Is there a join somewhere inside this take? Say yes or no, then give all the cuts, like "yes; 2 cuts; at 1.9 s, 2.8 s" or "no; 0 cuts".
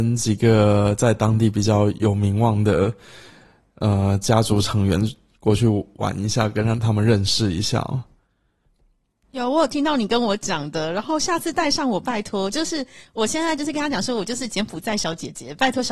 no; 0 cuts